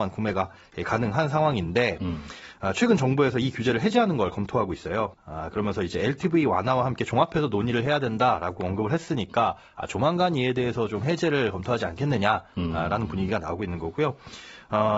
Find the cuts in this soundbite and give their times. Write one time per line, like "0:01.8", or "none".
0:05.1